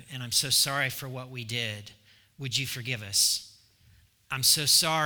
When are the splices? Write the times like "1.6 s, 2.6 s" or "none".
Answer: none